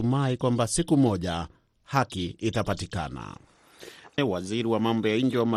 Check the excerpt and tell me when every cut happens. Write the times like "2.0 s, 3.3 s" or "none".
4.2 s